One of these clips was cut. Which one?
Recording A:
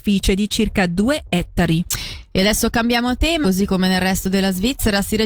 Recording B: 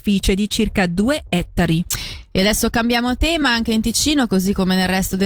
A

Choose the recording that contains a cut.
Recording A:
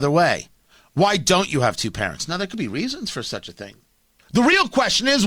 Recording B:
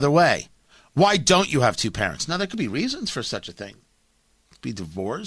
A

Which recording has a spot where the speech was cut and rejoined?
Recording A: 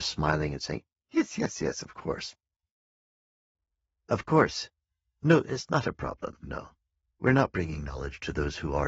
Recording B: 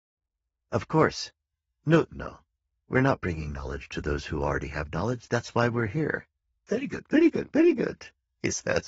B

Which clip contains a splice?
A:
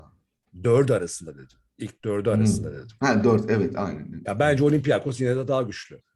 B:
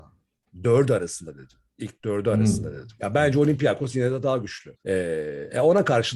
B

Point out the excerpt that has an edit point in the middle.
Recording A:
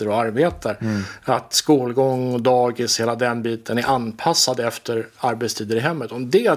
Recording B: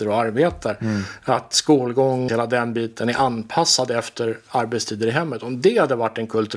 B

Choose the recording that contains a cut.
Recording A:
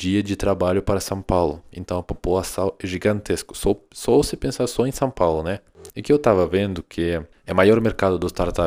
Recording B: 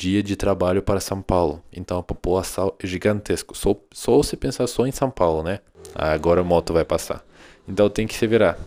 A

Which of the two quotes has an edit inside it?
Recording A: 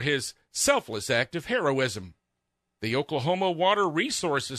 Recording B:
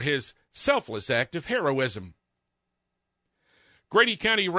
A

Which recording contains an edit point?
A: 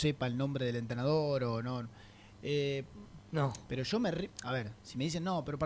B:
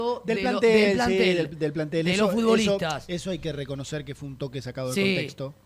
A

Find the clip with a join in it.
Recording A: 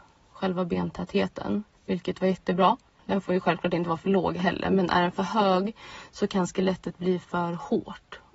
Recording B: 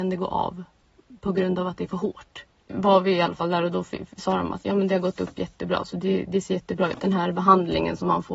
A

